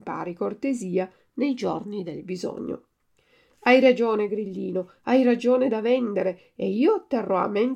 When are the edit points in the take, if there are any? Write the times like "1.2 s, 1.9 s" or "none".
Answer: none